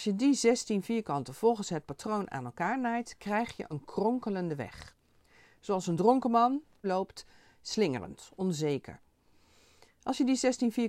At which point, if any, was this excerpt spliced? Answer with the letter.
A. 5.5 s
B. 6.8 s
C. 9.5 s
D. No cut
B